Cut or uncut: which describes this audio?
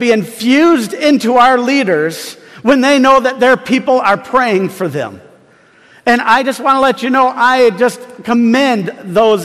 uncut